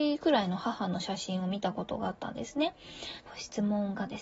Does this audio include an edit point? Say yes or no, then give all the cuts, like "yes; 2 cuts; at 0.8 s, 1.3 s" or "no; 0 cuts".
yes; 1 cut; at 3.2 s